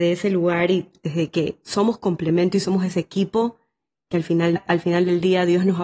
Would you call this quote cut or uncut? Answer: cut